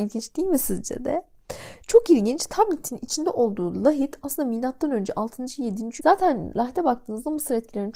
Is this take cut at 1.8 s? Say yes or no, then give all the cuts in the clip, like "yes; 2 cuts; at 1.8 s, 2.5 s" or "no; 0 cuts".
no; 1 cut; at 6.0 s